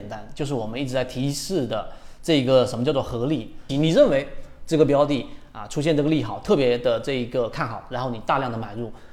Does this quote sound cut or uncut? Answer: cut